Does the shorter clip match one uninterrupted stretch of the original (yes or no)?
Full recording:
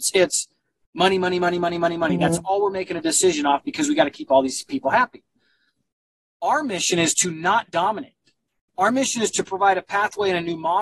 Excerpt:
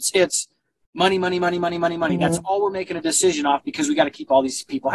yes